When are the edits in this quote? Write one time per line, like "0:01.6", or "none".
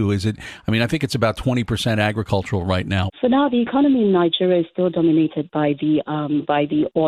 0:03.1